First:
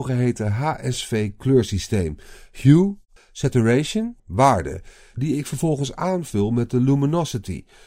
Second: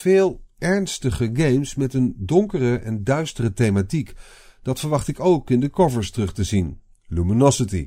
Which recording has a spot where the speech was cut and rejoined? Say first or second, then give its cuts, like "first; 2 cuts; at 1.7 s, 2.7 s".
first; 2 cuts; at 3.2 s, 4.2 s